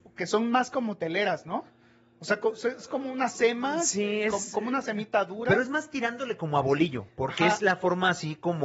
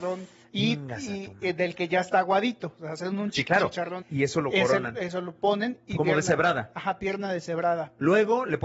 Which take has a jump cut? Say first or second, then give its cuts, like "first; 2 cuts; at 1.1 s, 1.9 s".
second; 2 cuts; at 4.0 s, 6.0 s